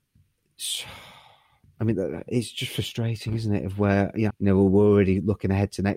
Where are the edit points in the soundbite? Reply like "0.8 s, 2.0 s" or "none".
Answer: 4.3 s